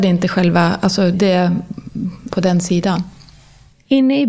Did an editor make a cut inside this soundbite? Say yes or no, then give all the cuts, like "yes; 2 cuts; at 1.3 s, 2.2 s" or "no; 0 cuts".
yes; 2 cuts; at 1.1 s, 2.3 s